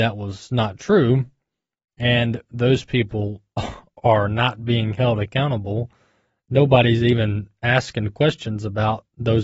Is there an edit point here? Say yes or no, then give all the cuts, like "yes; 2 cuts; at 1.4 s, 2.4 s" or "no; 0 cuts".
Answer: no; 0 cuts